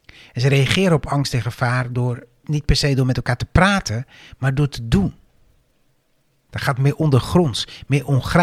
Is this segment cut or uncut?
cut